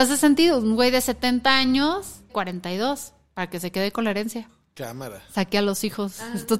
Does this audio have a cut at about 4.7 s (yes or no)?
no